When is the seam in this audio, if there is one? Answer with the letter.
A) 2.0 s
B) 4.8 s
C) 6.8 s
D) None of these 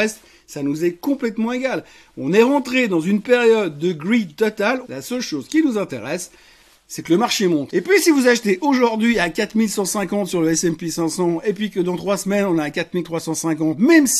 B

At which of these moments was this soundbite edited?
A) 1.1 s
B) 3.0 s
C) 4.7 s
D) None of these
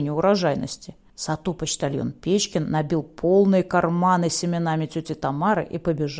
A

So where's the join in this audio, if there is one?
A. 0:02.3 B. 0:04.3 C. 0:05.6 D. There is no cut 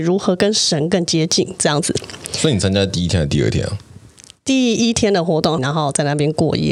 C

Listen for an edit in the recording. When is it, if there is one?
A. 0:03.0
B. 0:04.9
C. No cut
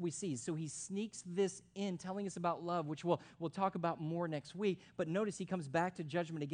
C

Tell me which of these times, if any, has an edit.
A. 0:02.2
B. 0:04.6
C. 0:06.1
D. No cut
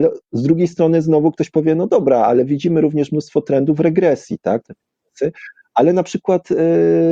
B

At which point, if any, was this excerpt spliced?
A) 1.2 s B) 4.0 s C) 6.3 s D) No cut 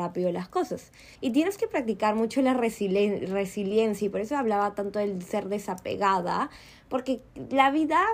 A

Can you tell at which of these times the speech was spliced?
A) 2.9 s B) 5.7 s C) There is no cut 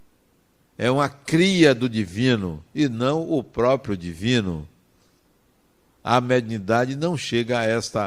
C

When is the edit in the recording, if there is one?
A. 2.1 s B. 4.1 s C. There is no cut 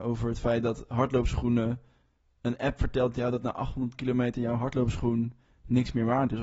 C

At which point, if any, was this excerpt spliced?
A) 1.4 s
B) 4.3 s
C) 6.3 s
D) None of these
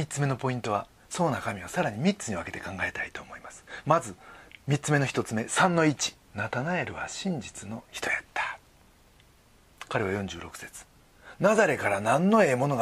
C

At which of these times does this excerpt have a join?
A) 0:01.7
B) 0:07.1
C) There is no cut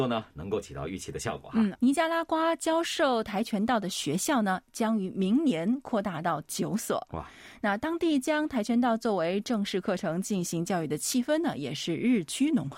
A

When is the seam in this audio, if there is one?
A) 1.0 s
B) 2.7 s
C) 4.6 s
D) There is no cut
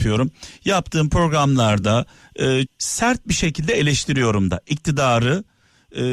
B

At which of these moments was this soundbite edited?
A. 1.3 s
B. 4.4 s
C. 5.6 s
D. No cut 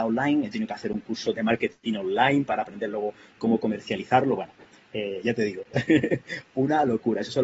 A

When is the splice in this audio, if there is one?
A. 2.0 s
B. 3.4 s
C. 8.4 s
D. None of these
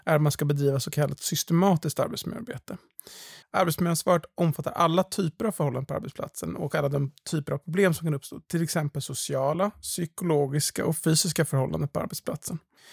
B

